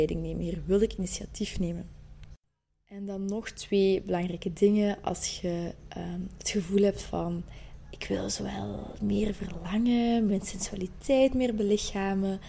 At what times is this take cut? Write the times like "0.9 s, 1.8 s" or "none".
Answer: 10.3 s